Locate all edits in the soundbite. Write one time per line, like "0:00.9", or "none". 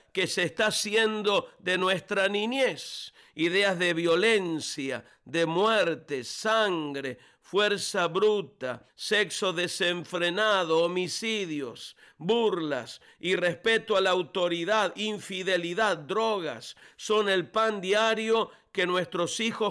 0:08.9